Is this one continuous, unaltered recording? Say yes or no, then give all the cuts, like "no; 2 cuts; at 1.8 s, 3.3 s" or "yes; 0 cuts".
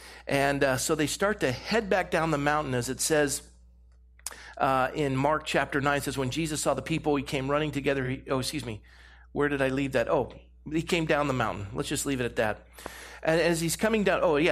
yes; 0 cuts